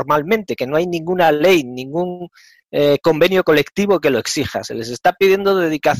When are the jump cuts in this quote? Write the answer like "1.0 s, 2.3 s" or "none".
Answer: none